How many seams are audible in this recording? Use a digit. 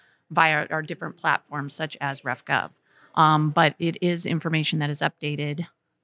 0